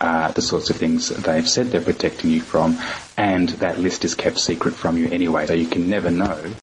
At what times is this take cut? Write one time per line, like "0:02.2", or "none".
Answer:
0:05.5